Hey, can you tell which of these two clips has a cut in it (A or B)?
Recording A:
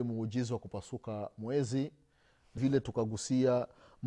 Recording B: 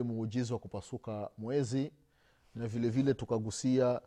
A